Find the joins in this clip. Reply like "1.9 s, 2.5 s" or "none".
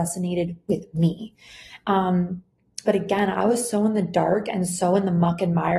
2.8 s